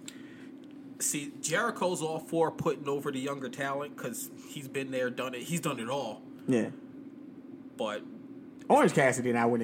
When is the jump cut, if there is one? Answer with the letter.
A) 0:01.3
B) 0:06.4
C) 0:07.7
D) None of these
D